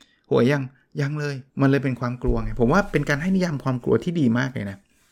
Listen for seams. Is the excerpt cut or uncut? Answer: cut